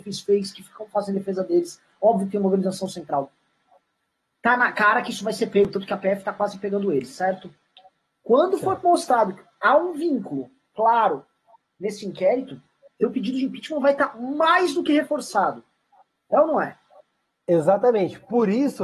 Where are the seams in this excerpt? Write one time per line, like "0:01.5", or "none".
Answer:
none